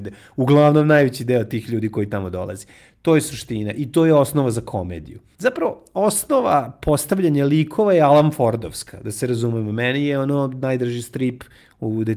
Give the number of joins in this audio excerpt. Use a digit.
1